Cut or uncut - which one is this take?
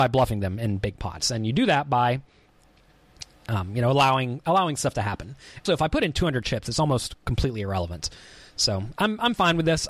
cut